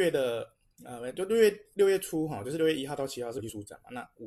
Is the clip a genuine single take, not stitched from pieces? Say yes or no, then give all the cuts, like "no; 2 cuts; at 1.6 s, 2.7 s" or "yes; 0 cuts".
yes; 0 cuts